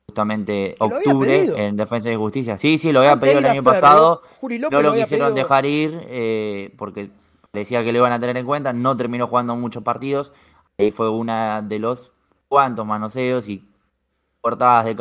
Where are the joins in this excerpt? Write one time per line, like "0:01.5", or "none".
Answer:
none